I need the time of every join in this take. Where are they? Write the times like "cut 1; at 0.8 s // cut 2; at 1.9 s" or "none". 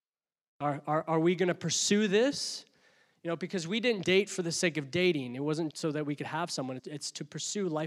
cut 1; at 4.0 s // cut 2; at 5.7 s // cut 3; at 6.8 s